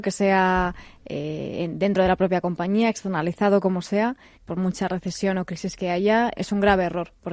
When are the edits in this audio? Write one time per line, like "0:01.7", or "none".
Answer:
0:04.3
0:06.4